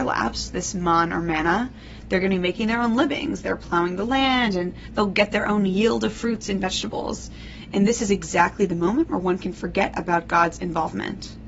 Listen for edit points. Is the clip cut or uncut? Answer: cut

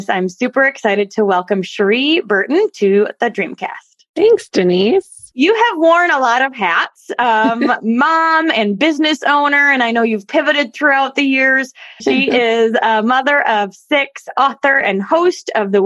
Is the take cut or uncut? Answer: cut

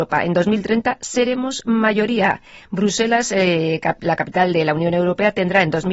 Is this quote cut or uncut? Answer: uncut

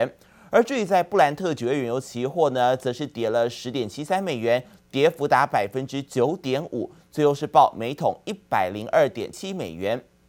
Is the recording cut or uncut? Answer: cut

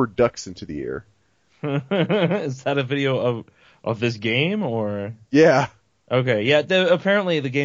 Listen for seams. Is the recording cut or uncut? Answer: uncut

